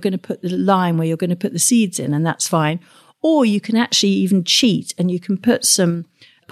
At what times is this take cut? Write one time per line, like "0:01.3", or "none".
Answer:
none